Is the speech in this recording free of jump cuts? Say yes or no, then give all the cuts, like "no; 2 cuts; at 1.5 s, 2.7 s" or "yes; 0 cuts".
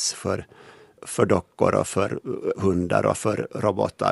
yes; 0 cuts